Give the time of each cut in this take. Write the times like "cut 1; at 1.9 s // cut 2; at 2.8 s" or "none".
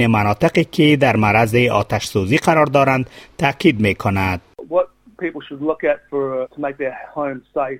cut 1; at 6.4 s